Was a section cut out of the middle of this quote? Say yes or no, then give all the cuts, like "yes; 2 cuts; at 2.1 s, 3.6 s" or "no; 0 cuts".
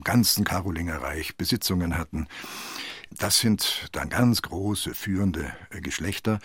no; 0 cuts